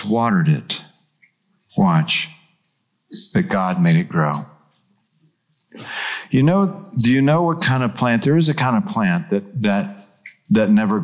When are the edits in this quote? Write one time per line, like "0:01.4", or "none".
none